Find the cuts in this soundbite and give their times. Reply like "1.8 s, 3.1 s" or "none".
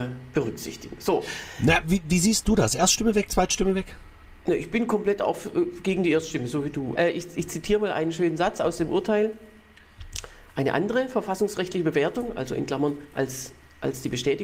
6.9 s